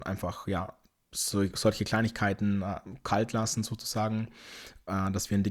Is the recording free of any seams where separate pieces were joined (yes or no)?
yes